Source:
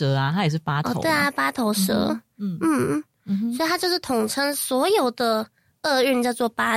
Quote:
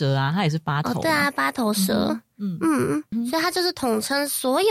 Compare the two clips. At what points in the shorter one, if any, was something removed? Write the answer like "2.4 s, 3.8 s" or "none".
3.1 s